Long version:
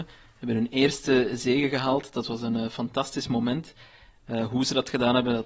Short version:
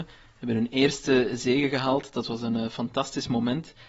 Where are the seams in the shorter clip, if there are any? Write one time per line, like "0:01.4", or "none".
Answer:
none